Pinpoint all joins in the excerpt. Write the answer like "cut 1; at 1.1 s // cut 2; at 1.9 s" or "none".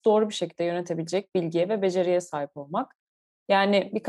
none